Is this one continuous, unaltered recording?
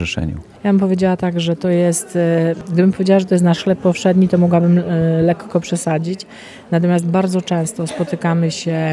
yes; 0 cuts

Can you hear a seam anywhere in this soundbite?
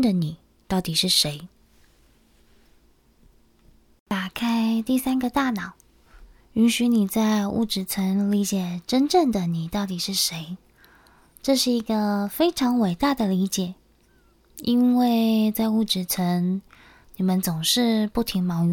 no; 0 cuts

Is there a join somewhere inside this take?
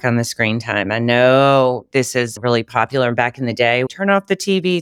yes; 1 cut; at 3.9 s

